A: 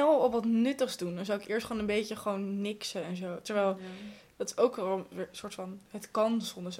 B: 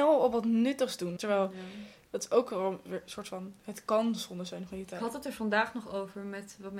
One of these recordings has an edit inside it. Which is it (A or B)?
B